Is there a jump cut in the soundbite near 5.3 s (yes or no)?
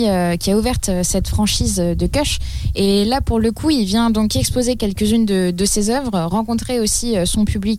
no